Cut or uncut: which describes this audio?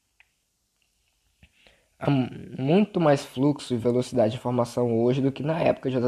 uncut